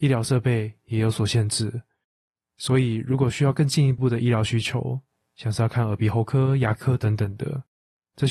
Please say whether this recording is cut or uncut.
uncut